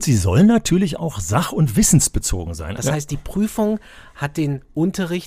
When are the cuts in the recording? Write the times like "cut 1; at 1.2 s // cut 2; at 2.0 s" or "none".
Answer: cut 1; at 2.8 s